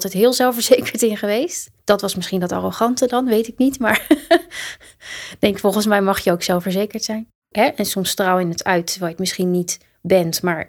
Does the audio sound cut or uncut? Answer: cut